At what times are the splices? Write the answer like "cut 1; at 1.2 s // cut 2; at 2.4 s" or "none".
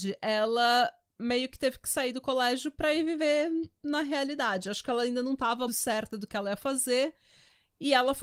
cut 1; at 5.7 s